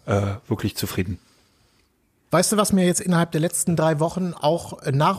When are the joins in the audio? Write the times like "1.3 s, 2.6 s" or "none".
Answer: 2.3 s